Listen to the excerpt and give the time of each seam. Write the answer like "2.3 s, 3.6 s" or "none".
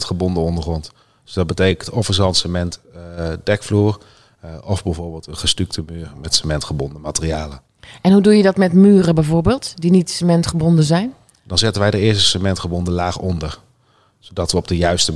none